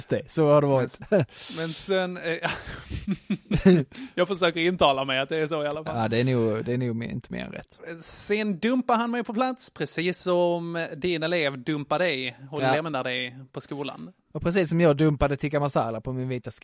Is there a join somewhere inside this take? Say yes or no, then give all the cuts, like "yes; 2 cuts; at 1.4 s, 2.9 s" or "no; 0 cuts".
no; 0 cuts